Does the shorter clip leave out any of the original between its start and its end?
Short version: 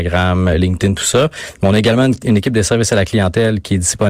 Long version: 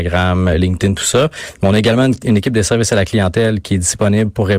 no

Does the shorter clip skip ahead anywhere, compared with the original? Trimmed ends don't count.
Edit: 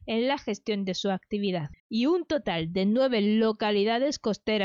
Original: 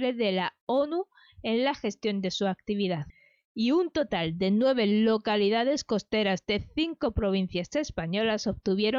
yes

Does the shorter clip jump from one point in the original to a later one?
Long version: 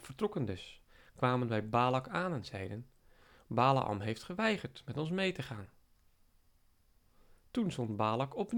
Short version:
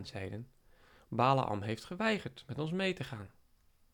no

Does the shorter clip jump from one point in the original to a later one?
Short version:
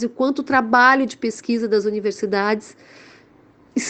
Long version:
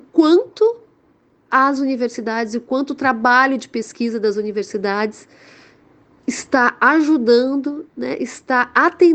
no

